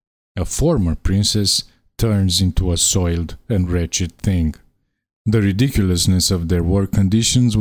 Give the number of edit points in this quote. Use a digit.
0